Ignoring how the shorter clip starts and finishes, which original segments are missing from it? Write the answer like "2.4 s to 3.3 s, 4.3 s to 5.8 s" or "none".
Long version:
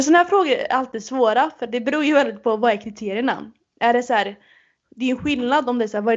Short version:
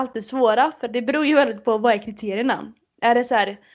none

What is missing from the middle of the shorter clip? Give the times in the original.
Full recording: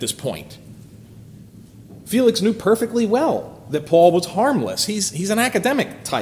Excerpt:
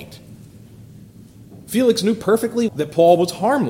3.1 s to 3.6 s

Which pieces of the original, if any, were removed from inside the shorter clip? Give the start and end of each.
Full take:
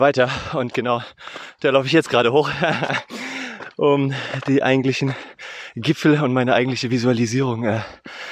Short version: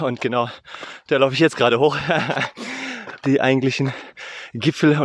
3.8 s to 4.4 s

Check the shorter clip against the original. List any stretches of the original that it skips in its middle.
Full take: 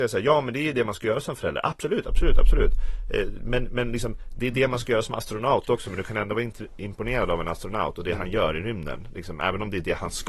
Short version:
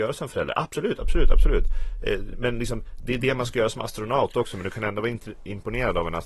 3.4 s to 3.7 s

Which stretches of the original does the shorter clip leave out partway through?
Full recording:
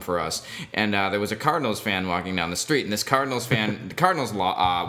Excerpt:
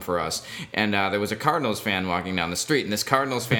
none

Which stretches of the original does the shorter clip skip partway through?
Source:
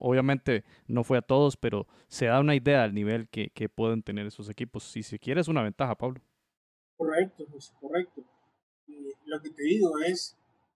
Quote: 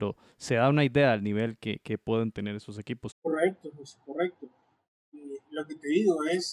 4.8 s to 6.9 s

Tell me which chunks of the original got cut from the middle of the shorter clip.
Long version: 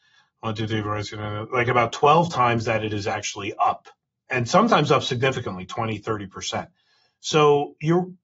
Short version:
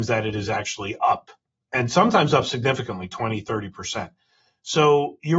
none

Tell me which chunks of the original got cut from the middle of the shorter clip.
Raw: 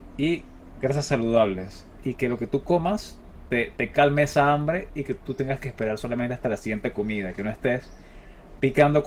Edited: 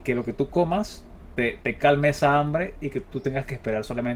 none

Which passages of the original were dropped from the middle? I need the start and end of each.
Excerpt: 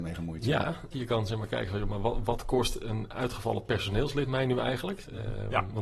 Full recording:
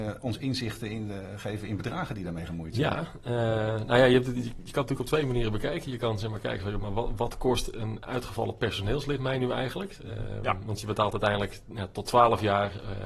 3.2 s to 5.8 s

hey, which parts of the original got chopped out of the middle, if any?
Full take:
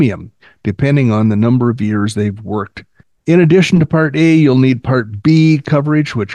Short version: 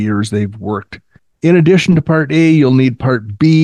none

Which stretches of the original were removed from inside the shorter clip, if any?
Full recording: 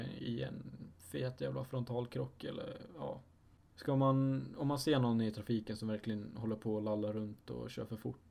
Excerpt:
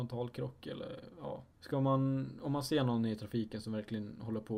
3.3 s to 3.7 s

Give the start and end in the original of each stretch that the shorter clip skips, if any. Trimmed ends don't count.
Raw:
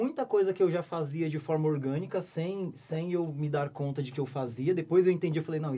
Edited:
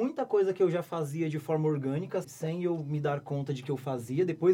2.2 s to 2.7 s

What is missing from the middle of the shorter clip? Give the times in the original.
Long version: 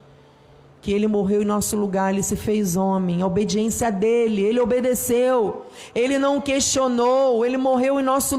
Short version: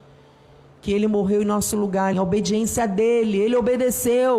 2.1 s to 3.2 s

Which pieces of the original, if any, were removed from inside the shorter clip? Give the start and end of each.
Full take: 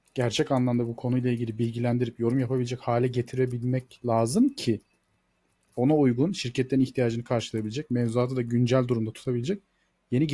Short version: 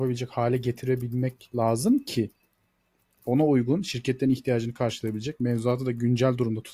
none

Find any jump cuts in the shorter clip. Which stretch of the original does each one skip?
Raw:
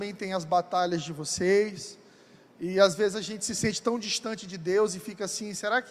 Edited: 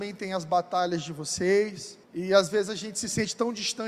2.0 s to 2.5 s

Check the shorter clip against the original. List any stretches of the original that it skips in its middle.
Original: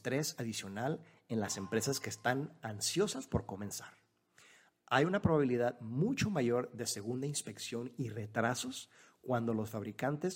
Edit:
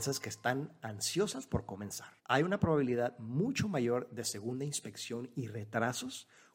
4.0 s to 4.8 s

